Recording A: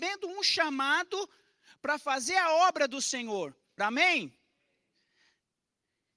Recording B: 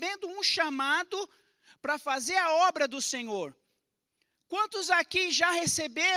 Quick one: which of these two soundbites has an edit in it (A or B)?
A